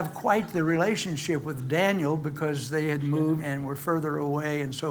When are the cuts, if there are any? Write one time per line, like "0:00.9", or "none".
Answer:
0:03.4